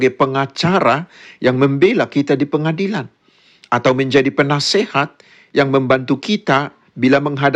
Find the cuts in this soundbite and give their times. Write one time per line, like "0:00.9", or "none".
none